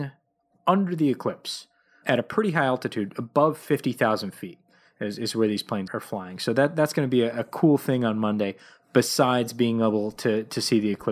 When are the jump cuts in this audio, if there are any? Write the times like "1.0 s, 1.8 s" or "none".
5.9 s